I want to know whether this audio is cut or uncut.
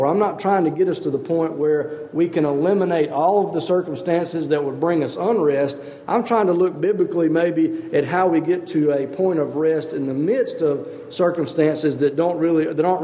uncut